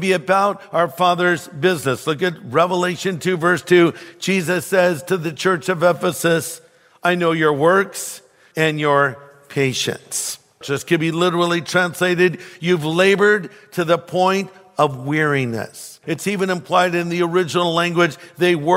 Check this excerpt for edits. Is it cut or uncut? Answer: cut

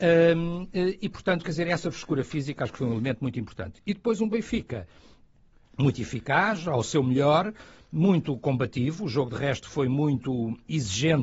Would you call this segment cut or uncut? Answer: uncut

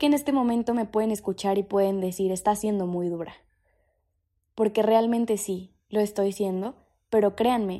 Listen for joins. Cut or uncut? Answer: uncut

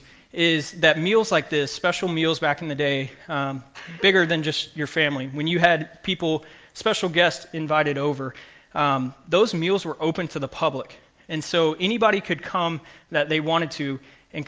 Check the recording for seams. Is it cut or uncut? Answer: uncut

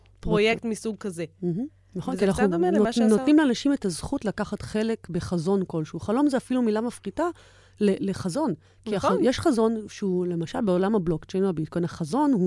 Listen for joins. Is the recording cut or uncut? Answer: uncut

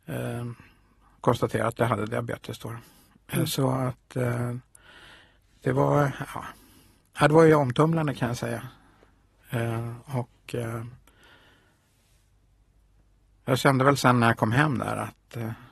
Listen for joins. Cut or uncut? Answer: uncut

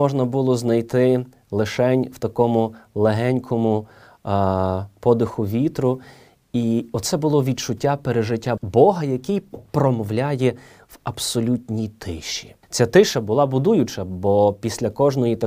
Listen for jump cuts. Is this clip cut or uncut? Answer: cut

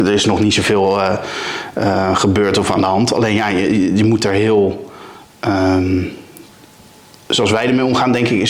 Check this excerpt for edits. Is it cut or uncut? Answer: uncut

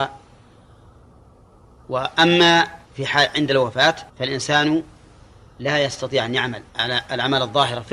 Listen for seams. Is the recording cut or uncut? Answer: cut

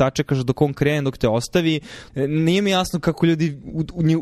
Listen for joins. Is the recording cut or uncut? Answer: cut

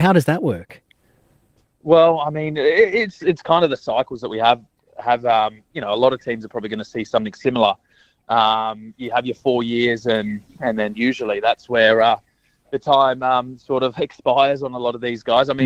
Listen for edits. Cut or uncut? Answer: uncut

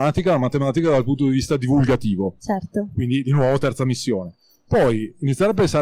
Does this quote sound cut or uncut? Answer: uncut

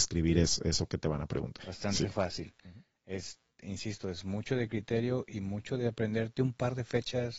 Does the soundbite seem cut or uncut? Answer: cut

